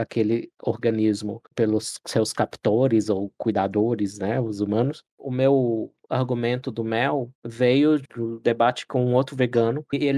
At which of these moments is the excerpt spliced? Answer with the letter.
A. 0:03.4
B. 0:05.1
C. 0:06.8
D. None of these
B